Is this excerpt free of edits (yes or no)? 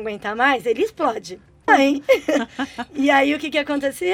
no